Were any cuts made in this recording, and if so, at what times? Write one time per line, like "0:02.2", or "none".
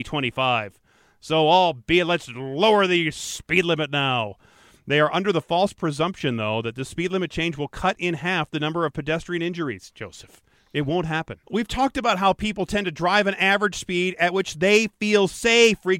0:11.4